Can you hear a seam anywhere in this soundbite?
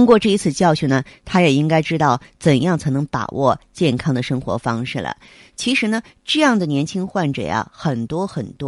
no; 0 cuts

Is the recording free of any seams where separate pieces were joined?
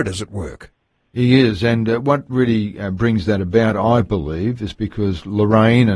yes; 0 cuts

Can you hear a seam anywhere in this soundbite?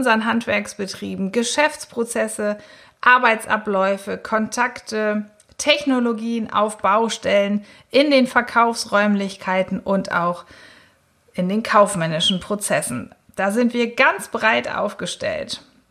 no; 0 cuts

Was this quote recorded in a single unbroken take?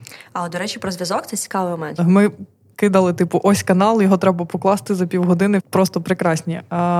no; 2 cuts; at 2.0 s, 5.6 s

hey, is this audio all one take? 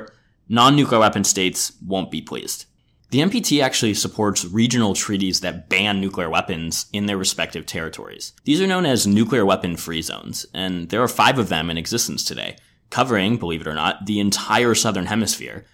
no; 2 cuts; at 3.0 s, 8.4 s

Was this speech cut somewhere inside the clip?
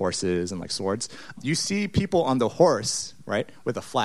yes; 1 cut; at 1.4 s

